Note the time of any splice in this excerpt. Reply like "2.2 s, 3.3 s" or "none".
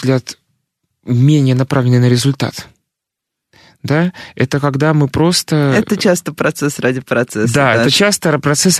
none

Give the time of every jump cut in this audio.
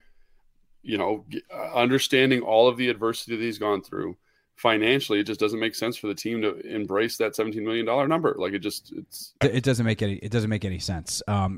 9.4 s

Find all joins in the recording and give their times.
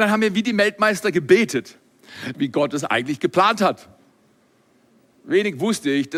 2.3 s

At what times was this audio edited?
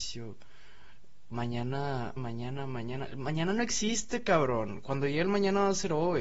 2.2 s

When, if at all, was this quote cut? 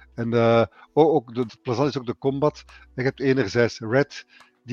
1.5 s

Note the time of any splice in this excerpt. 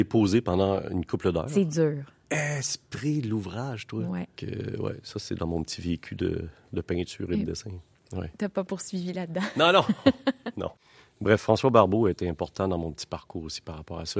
4.4 s

